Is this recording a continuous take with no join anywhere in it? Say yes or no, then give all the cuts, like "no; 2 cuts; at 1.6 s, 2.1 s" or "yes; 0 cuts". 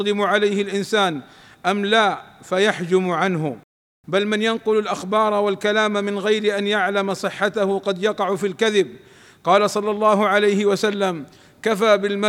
yes; 0 cuts